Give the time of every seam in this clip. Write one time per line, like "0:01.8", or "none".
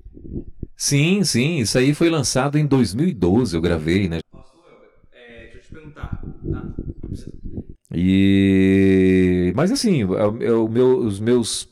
0:04.2
0:07.7